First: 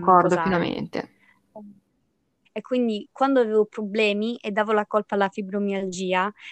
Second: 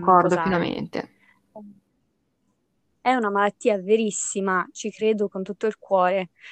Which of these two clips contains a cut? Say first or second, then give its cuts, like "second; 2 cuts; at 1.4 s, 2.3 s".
first; 1 cut; at 2.5 s